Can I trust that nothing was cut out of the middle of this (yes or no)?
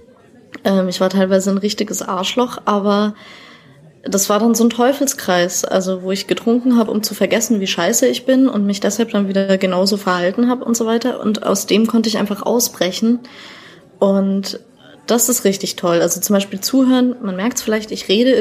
yes